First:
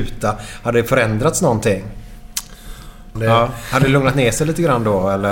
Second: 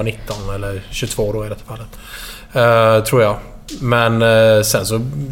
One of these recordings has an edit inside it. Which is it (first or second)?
first